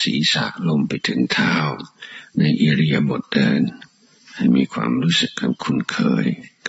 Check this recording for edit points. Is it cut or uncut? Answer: uncut